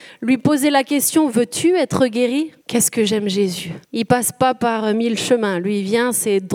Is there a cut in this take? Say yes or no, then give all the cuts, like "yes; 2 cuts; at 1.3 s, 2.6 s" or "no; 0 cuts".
yes; 2 cuts; at 2.6 s, 3.8 s